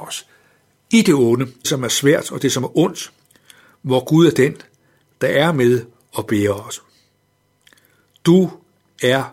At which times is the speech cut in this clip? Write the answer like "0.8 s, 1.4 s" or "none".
1.6 s